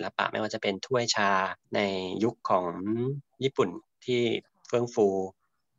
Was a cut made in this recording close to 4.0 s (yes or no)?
no